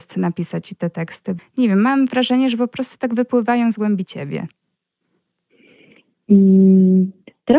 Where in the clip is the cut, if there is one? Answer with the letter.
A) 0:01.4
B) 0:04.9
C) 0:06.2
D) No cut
A